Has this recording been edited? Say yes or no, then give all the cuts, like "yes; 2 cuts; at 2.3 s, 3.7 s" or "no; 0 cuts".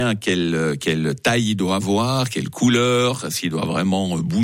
no; 0 cuts